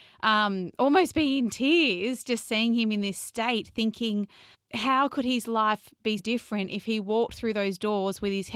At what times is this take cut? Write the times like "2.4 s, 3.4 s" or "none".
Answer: 4.5 s, 6.2 s